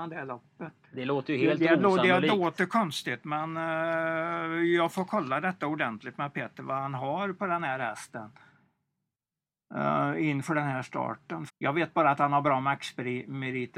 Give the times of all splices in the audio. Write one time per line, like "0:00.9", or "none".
0:11.5